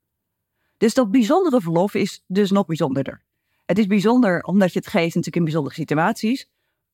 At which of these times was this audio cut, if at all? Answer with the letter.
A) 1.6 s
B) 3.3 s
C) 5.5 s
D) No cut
D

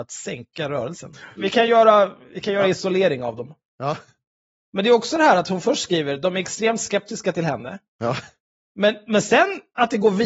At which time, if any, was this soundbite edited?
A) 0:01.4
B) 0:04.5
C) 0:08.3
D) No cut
A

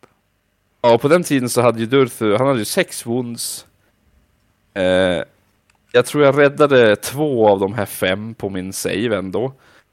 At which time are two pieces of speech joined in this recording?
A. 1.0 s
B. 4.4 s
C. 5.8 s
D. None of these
D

